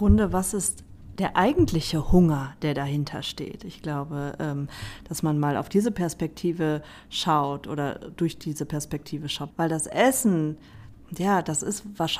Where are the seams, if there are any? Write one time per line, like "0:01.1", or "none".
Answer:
0:09.5